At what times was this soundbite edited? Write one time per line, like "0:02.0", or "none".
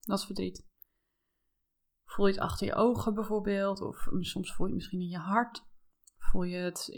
none